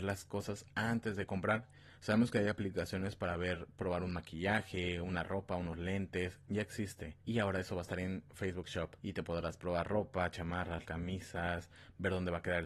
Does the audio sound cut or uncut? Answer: cut